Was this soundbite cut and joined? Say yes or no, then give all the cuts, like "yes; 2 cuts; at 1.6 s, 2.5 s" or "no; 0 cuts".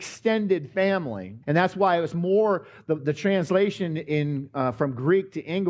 yes; 1 cut; at 1.4 s